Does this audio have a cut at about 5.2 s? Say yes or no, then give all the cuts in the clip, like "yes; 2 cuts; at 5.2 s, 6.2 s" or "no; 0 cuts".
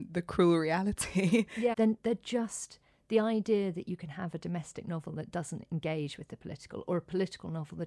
no; 1 cut; at 1.7 s